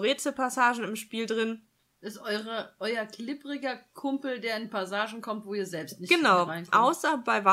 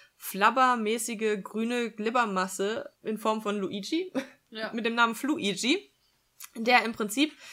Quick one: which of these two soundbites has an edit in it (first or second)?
second